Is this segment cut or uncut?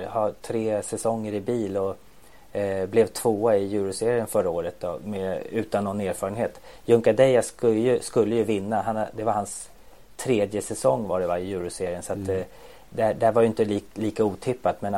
uncut